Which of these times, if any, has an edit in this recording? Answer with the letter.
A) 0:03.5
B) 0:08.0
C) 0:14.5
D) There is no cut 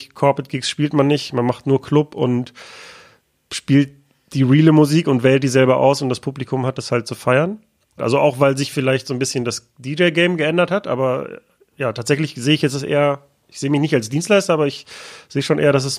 B